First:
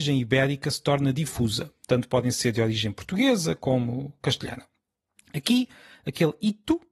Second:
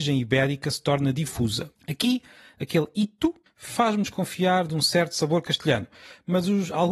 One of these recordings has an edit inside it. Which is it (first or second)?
second